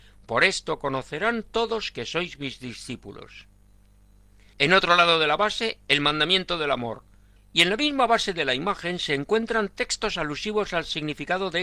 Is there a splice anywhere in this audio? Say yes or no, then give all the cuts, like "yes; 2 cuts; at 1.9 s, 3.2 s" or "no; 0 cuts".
yes; 2 cuts; at 4.5 s, 7.4 s